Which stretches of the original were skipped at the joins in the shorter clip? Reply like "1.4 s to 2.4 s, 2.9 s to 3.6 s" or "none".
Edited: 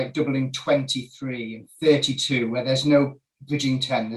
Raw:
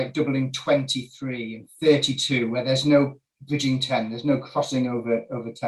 none